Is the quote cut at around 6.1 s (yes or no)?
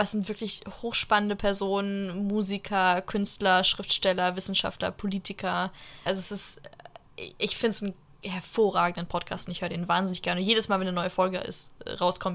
yes